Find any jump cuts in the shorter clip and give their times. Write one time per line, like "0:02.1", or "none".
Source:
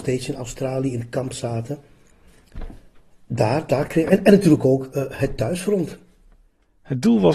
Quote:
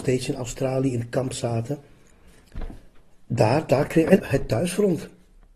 0:04.2